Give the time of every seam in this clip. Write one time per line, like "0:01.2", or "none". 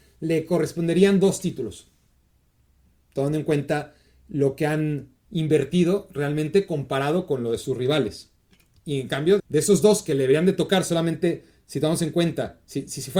0:09.4